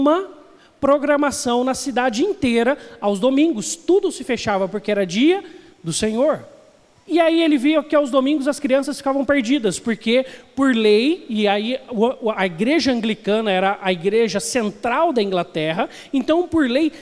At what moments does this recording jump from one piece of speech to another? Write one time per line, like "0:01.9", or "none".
0:06.9
0:12.3